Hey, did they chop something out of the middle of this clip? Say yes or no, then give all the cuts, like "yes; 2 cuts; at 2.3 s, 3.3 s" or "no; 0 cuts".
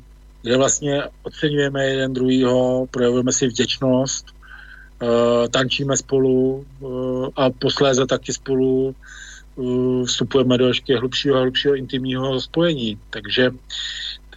no; 0 cuts